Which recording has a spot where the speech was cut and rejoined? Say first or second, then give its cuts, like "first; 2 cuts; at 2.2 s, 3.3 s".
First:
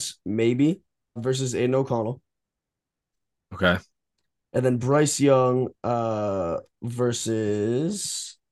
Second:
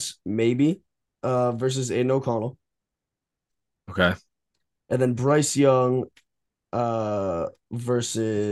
first; 2 cuts; at 1.2 s, 5.7 s